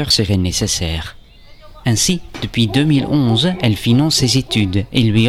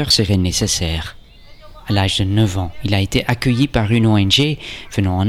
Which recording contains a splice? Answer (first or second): first